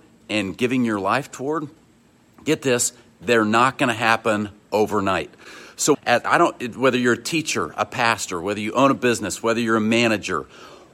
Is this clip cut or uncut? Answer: cut